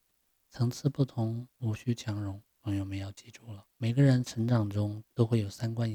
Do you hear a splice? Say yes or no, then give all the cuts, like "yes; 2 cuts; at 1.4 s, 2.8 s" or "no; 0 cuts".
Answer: yes; 2 cuts; at 2.5 s, 3.7 s